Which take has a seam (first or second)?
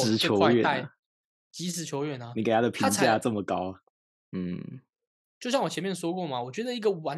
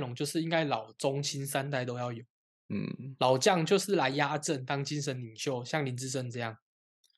first